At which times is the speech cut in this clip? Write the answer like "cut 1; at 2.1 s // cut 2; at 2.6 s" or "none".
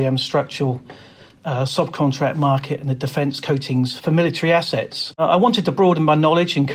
none